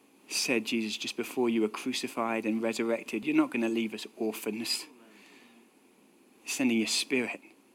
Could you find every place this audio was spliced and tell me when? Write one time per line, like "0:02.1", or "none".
0:03.2